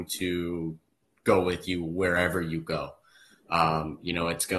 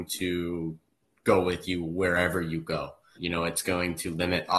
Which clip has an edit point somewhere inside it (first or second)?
second